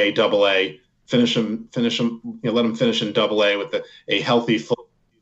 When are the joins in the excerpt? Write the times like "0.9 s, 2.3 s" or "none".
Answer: none